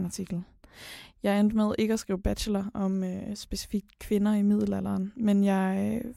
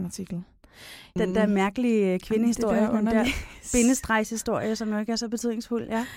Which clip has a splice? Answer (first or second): second